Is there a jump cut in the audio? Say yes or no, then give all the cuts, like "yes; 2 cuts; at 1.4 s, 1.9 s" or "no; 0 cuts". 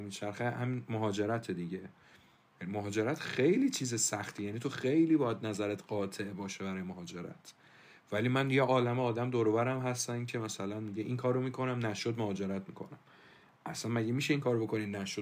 no; 0 cuts